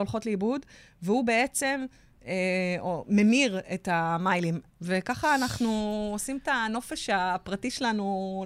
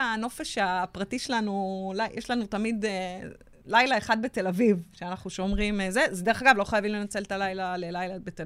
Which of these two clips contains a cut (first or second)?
first